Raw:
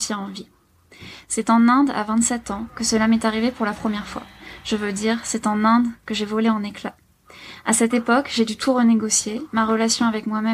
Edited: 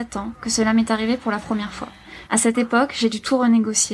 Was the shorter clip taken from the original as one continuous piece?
no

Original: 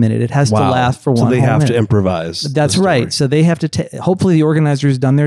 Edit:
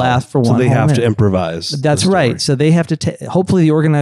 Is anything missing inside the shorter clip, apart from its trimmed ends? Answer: no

